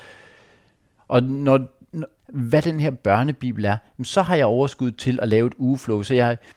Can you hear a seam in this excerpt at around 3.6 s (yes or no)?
no